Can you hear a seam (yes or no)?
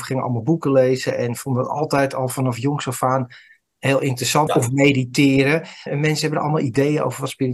yes